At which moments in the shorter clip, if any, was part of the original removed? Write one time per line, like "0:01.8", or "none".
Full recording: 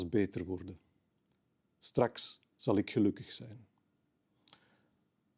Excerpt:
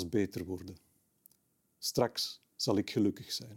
none